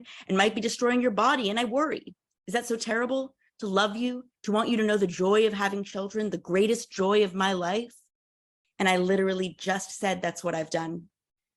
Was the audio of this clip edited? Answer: yes; 2 cuts; at 4.4 s, 8.6 s

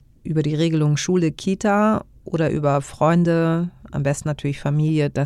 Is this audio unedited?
yes; 0 cuts

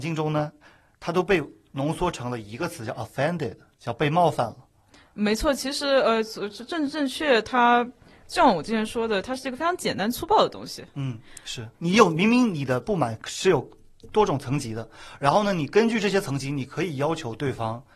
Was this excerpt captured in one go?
yes; 0 cuts

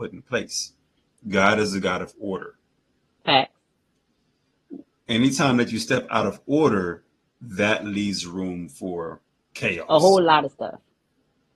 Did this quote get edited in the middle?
no; 0 cuts

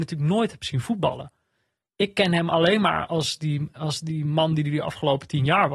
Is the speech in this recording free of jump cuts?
yes; 0 cuts

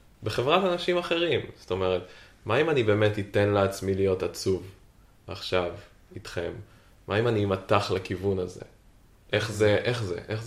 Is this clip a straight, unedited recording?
yes; 0 cuts

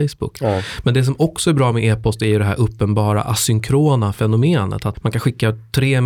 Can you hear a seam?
yes; 1 cut; at 4.9 s

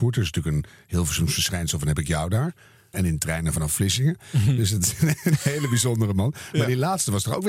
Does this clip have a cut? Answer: yes; 1 cut; at 2.9 s

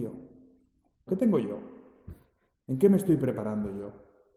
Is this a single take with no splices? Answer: no; 2 cuts; at 1.1 s, 2.5 s

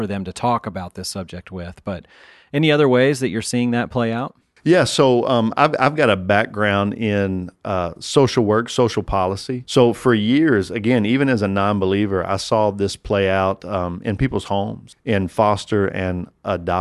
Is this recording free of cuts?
yes; 0 cuts

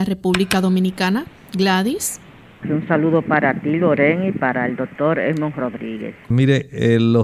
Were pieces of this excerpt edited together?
yes; 2 cuts; at 2.6 s, 6.3 s

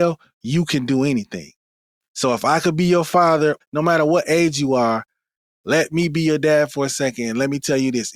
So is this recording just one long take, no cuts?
no; 1 cut; at 3.6 s

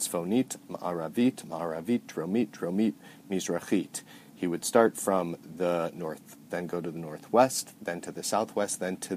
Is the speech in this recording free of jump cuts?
no; 2 cuts; at 6.5 s, 7.7 s

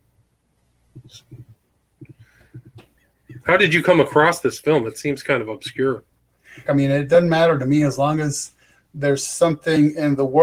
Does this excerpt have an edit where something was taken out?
yes; 1 cut; at 6.7 s

